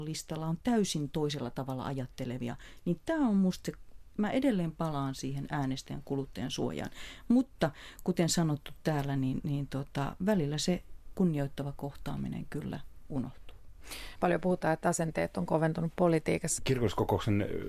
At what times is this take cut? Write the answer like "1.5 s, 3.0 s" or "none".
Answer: 14.2 s, 16.6 s